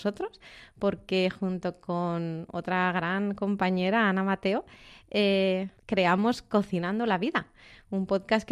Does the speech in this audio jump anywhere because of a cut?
yes; 1 cut; at 5.8 s

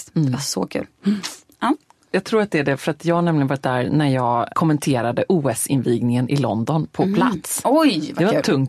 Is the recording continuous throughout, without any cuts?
no; 1 cut; at 4.5 s

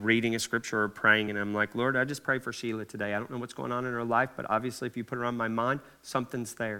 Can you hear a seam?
no; 0 cuts

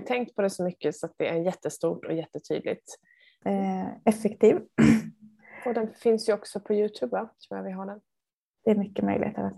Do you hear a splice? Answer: yes; 1 cut; at 3.4 s

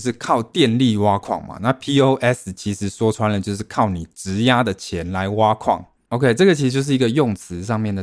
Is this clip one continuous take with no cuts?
no; 1 cut; at 6.1 s

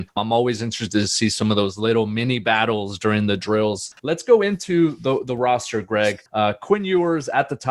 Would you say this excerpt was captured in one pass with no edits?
yes; 0 cuts

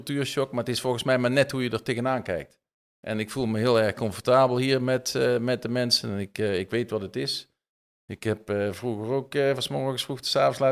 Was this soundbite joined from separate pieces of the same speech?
no; 0 cuts

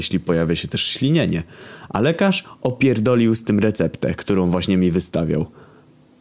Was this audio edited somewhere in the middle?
no; 0 cuts

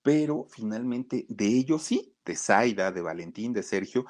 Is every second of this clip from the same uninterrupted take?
yes; 0 cuts

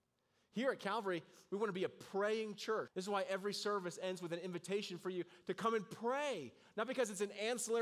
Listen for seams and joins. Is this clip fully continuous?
no; 1 cut; at 2.9 s

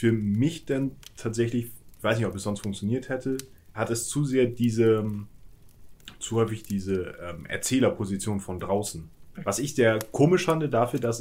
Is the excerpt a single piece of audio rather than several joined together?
no; 2 cuts; at 3.7 s, 9.4 s

